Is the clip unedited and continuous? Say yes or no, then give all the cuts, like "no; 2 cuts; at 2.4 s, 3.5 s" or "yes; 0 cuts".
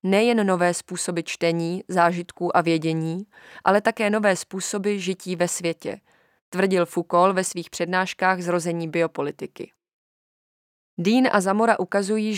yes; 0 cuts